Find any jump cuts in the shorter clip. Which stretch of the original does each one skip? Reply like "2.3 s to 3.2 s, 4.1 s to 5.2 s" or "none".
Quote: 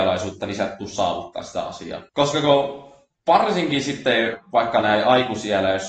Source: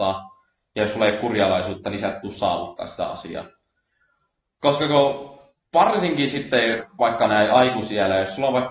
3.5 s to 4.6 s